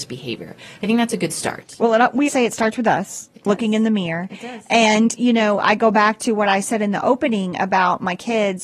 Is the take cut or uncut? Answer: cut